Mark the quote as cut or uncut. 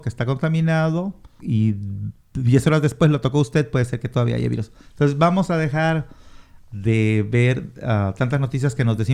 cut